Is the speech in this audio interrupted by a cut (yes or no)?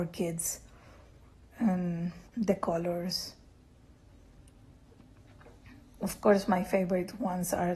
yes